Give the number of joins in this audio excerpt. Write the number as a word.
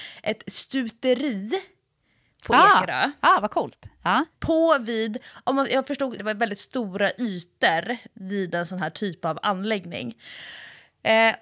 two